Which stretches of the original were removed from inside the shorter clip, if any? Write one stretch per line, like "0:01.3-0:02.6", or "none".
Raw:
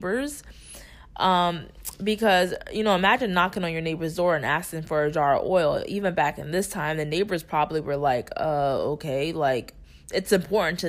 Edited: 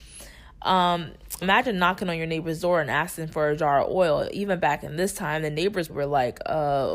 0:02.0-0:03.0
0:07.4-0:07.8